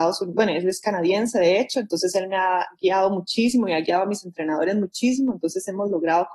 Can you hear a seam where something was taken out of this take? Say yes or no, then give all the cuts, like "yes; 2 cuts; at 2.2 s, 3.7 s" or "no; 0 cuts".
no; 0 cuts